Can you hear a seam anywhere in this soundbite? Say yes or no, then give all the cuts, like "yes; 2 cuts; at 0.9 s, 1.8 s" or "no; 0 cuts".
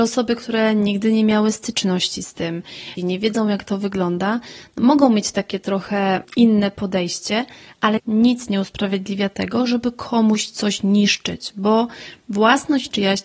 yes; 2 cuts; at 3.0 s, 8.0 s